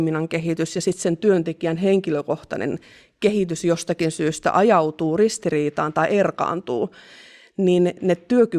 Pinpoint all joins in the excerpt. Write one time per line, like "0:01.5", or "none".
none